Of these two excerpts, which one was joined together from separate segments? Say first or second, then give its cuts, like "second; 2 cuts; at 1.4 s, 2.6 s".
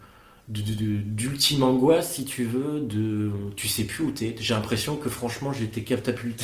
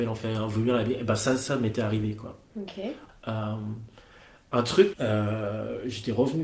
second; 2 cuts; at 3.1 s, 4.9 s